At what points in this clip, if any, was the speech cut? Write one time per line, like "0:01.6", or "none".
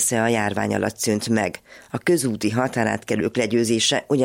none